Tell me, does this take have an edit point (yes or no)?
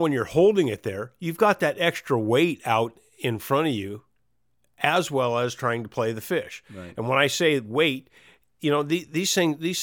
no